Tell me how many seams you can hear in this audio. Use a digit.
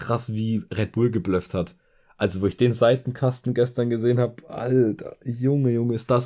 0